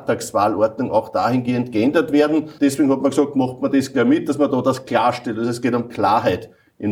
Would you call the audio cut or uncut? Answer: cut